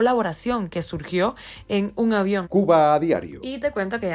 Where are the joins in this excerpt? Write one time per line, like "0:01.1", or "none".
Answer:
0:02.4